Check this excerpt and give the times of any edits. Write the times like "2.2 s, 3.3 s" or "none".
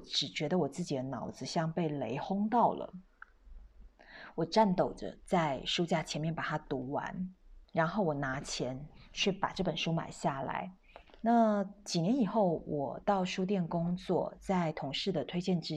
11.1 s